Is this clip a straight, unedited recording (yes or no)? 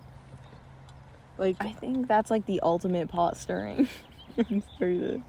yes